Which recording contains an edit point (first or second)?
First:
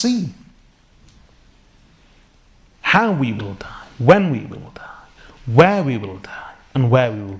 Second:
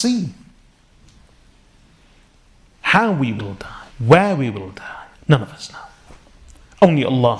second